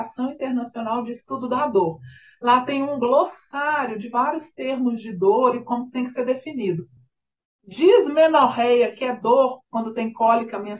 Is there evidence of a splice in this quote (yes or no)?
no